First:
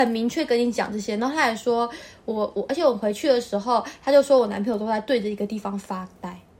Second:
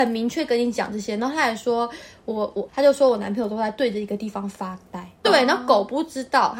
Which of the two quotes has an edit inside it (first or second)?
second